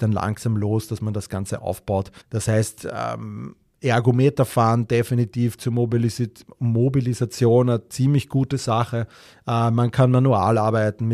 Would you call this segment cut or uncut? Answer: cut